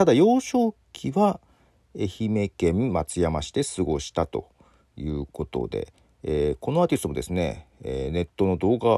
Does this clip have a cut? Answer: no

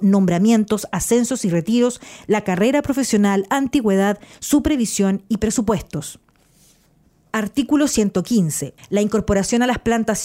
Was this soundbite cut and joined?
yes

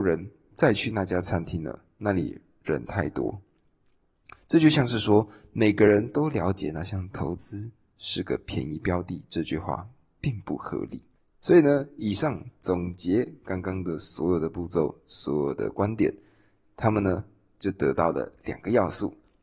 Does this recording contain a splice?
no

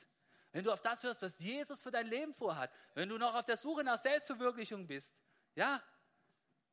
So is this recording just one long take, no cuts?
yes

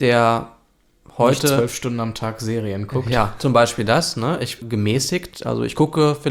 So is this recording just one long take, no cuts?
no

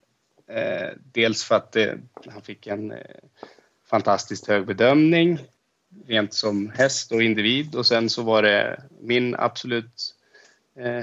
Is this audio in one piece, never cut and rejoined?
yes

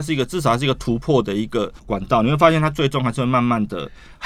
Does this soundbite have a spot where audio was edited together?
yes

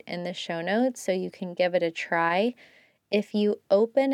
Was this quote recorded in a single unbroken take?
yes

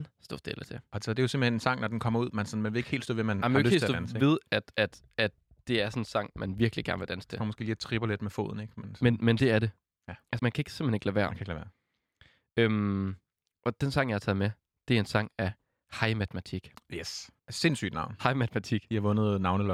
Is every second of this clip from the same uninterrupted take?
no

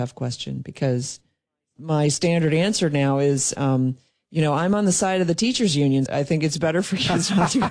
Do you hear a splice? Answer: yes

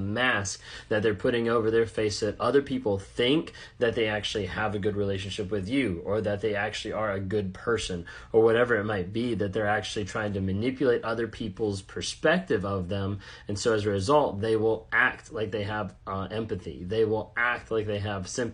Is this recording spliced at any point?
no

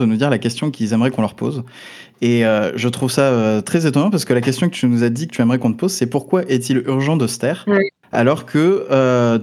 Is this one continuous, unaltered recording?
yes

